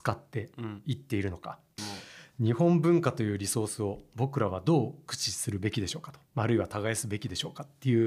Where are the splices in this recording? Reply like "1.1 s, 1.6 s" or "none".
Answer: 1.8 s, 6.3 s